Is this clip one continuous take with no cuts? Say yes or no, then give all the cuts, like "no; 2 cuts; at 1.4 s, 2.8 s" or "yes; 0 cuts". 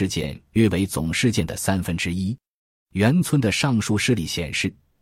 yes; 0 cuts